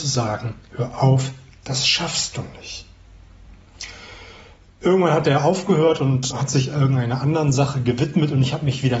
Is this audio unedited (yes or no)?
no